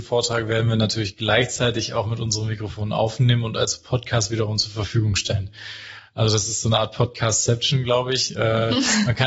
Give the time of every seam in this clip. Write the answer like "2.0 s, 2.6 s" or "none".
none